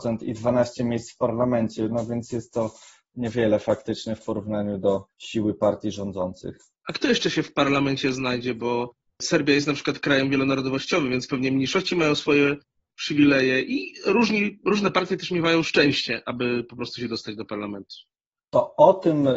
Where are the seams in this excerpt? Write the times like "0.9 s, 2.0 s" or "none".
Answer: none